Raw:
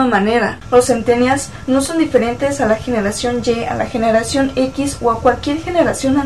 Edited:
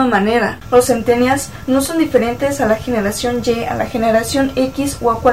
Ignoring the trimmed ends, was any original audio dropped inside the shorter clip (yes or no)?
no